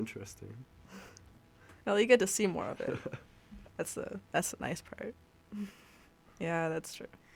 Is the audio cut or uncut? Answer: cut